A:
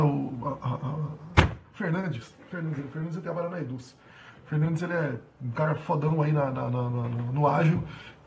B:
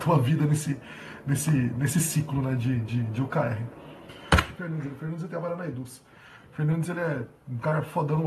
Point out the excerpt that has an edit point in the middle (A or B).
B